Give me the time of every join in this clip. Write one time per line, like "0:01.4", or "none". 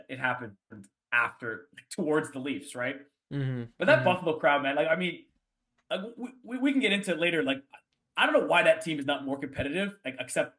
none